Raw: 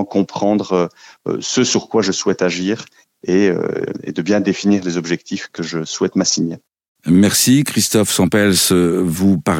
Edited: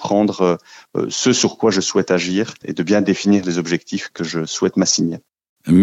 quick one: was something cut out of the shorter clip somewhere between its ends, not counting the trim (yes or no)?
yes